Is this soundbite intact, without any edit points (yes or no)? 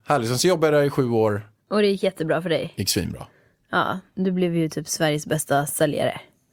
yes